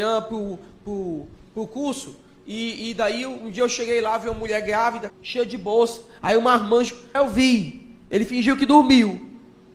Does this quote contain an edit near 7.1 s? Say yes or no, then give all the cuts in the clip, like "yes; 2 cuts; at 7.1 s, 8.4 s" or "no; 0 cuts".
yes; 2 cuts; at 5.1 s, 7.1 s